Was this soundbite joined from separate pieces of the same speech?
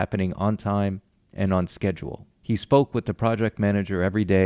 yes; 1 cut; at 2.3 s

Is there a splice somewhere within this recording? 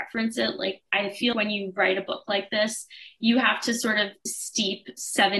yes; 1 cut; at 1.3 s

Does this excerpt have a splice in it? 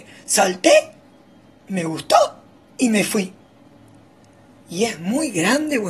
no; 0 cuts

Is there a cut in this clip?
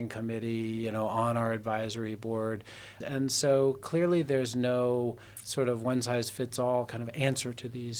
yes; 1 cut; at 3.0 s

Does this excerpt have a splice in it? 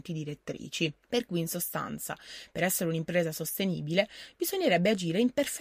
yes; 1 cut; at 1.0 s

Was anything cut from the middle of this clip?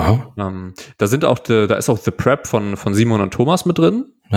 no; 0 cuts

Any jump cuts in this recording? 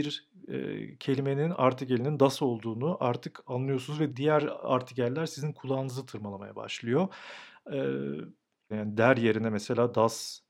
yes; 2 cuts; at 4.1 s, 8.7 s

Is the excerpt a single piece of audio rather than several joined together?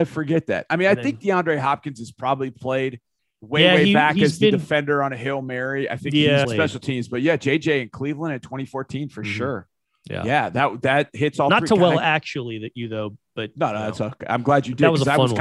no; 1 cut; at 6.4 s

